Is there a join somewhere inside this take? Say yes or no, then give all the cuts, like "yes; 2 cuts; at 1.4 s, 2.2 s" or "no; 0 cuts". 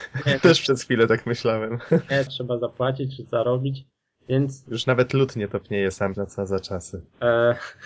yes; 2 cuts; at 2.3 s, 6.1 s